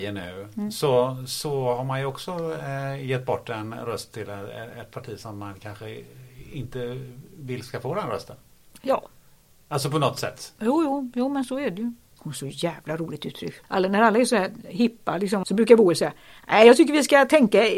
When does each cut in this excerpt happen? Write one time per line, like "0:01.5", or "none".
0:12.2
0:13.6
0:15.4